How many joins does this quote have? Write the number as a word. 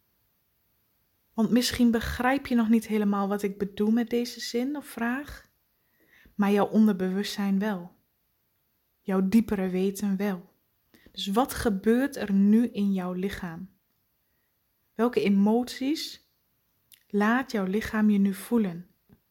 zero